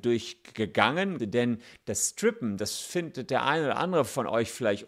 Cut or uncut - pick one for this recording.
cut